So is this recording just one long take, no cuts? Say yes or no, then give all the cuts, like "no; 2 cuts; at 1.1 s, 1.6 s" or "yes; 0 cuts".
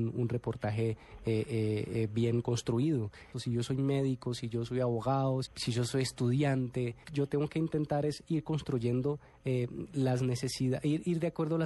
no; 3 cuts; at 3.3 s, 5.5 s, 7.0 s